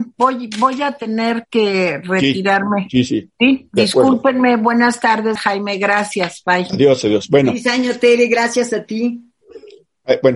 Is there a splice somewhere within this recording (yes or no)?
yes